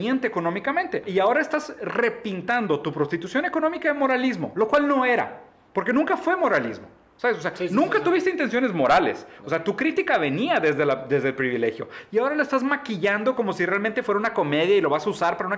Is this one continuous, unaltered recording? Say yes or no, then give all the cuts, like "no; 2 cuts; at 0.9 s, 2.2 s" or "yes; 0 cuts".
no; 1 cut; at 1.0 s